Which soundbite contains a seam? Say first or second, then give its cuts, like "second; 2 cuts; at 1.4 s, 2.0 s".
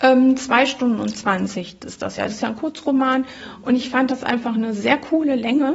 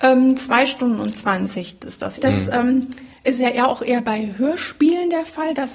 second; 1 cut; at 2.2 s